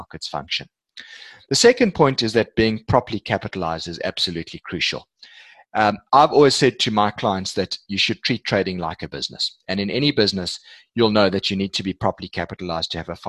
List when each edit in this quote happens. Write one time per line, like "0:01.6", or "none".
none